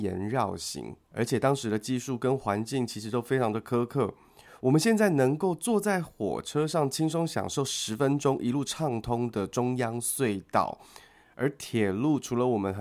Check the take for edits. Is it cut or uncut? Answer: cut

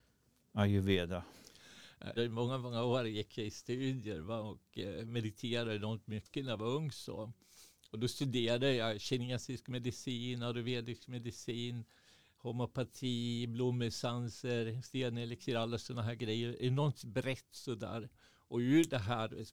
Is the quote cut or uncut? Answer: cut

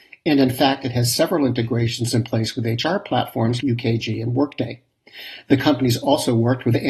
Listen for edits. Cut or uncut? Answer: cut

